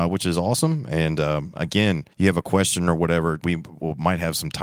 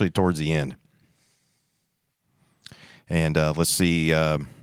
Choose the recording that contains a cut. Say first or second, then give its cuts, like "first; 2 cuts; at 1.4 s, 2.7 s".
first; 2 cuts; at 2.1 s, 3.4 s